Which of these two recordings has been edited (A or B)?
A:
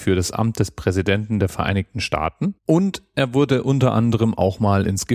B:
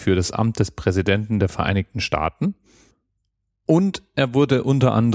A